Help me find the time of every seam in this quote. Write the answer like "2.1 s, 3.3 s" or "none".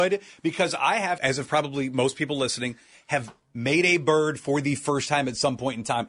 1.2 s